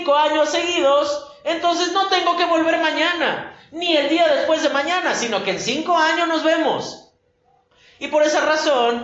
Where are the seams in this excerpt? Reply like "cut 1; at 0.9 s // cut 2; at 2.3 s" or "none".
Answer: none